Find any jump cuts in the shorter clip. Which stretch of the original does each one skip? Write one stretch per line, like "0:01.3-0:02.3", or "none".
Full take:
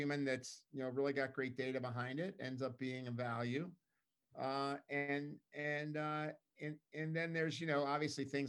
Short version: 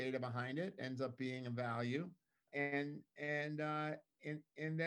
0:04.1-0:04.8